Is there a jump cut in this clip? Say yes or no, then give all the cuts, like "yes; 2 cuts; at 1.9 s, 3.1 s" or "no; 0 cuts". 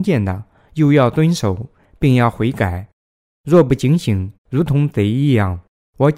yes; 1 cut; at 4.3 s